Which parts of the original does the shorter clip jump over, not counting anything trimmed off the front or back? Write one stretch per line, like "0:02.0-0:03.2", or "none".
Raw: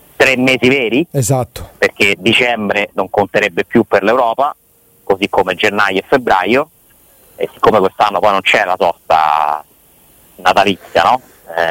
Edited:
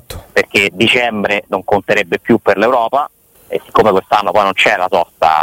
0:04.8-0:07.2